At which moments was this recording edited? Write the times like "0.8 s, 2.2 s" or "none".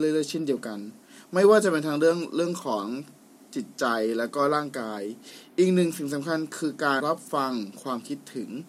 7.0 s